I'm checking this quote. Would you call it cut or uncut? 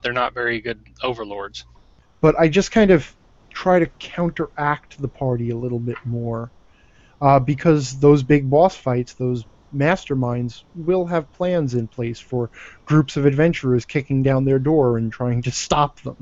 cut